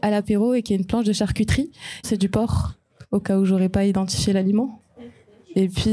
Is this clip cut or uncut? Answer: cut